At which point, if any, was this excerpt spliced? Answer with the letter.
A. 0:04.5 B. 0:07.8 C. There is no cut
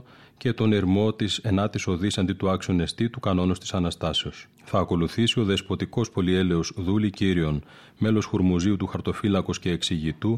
A